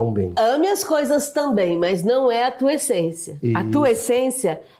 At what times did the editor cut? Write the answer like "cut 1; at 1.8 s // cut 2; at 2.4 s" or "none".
none